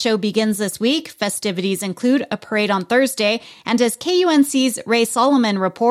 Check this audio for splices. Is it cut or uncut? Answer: uncut